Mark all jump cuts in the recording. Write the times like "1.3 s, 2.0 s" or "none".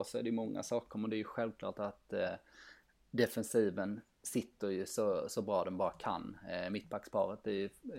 none